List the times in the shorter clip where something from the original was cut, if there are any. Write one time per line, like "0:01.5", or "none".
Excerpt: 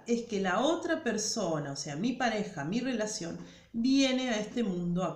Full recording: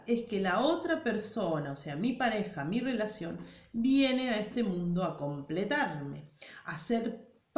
none